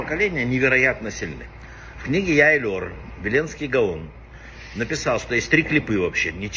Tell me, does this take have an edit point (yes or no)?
yes